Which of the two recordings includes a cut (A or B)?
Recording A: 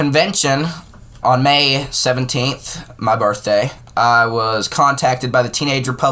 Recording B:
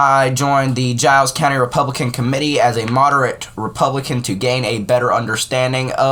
A